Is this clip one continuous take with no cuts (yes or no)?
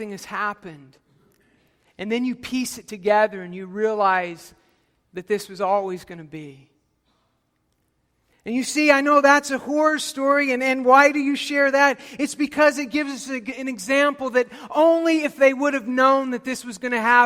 yes